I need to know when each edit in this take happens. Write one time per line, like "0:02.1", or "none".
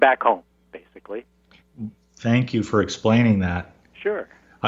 none

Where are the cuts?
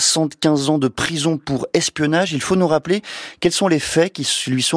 none

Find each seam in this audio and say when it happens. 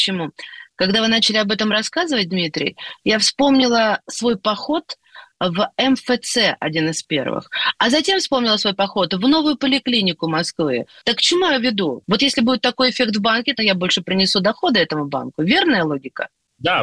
0:11.0
0:12.0
0:13.6

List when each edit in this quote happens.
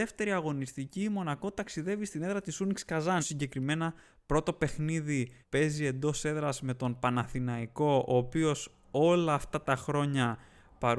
0:03.2
0:05.4

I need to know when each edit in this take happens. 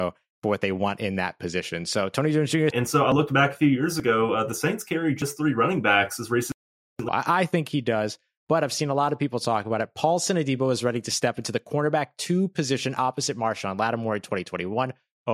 0:02.7
0:07.1

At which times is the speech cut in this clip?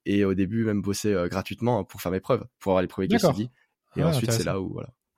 none

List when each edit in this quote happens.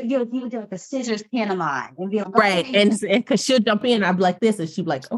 0:02.2

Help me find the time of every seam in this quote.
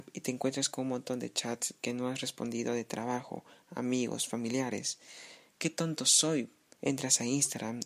0:05.5
0:06.7

